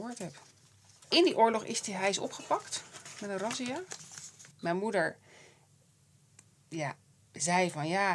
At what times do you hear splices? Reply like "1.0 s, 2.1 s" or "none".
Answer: 4.5 s